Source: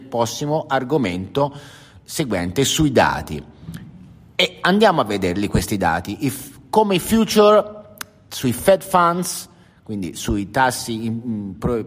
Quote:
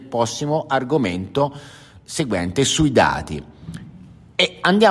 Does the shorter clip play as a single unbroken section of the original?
yes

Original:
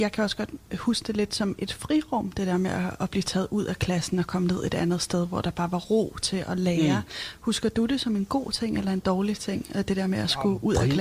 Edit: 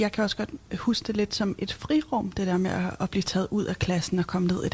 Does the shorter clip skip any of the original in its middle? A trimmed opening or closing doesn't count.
no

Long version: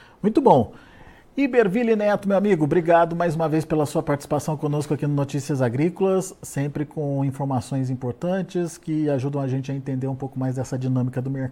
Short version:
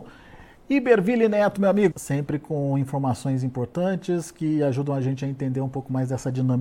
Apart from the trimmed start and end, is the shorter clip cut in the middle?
yes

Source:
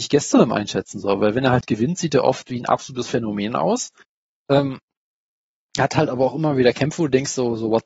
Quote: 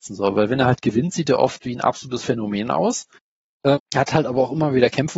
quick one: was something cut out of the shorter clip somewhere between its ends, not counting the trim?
yes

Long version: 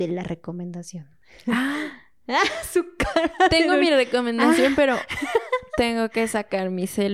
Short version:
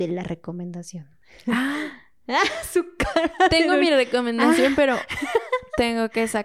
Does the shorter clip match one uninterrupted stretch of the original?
yes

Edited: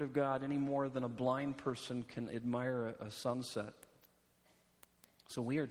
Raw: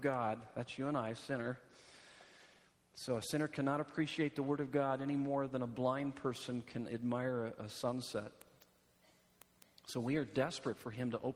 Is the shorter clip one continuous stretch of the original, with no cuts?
yes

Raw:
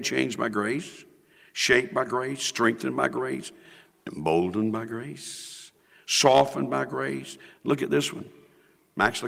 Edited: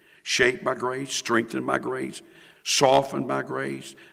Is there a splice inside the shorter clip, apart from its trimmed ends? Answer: yes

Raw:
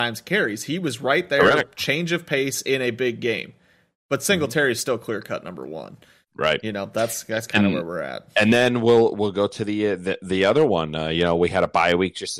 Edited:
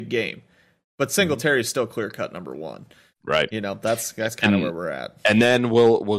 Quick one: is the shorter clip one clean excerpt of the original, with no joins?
yes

